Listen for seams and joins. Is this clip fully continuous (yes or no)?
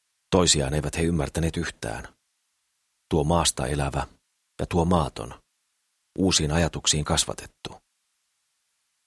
yes